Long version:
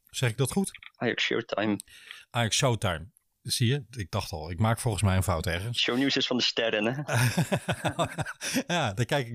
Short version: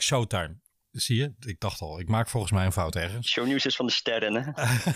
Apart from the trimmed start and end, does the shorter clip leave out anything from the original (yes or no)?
no